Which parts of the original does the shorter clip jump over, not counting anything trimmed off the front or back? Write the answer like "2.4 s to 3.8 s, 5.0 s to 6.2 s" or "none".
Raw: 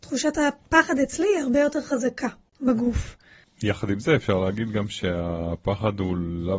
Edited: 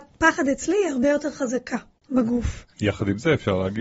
3.2 s to 3.5 s